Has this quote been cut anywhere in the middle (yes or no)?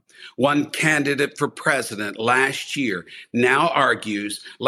no